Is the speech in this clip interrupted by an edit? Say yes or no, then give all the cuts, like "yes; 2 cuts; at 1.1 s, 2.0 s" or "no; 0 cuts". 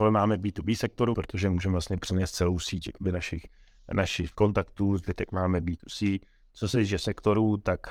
yes; 1 cut; at 1.1 s